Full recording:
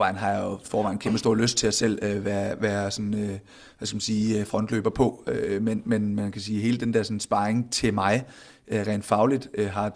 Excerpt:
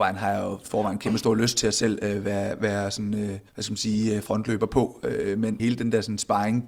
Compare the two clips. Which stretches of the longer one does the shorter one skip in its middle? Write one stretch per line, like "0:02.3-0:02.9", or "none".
0:03.5-0:03.7
0:05.8-0:06.6